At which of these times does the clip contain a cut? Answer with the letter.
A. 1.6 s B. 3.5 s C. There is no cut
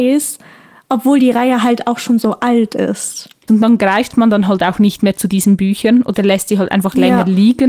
B